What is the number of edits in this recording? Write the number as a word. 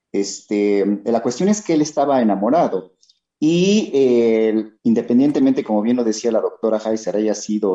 one